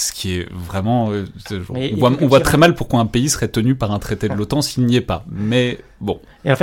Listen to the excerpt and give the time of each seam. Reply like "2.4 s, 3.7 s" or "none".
none